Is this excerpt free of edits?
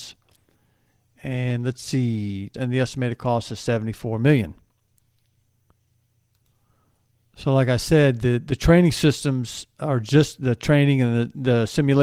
no; 1 cut; at 2.5 s

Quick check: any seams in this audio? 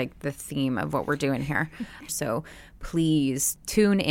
yes; 1 cut; at 2.1 s

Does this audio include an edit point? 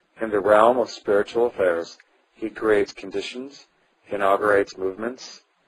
no; 0 cuts

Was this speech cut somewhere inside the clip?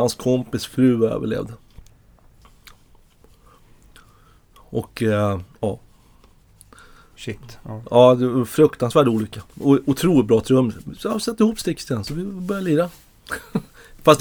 yes; 1 cut; at 9.5 s

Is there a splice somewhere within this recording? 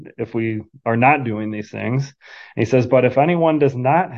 no; 0 cuts

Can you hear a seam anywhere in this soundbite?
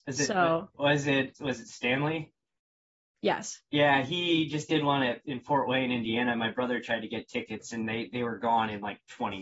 no; 0 cuts

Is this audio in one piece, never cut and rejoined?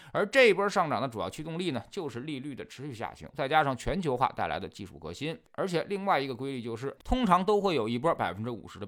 no; 3 cuts; at 3.3 s, 5.5 s, 7.0 s

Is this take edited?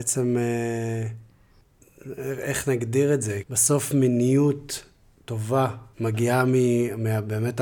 yes; 2 cuts; at 3.4 s, 5.9 s

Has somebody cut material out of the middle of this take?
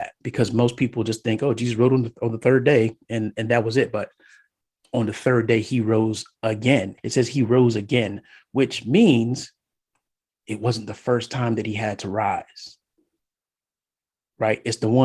yes; 1 cut; at 7.0 s

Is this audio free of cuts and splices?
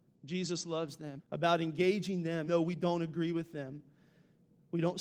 no; 2 cuts; at 1.2 s, 2.5 s

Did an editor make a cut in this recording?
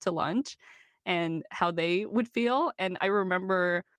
no; 0 cuts

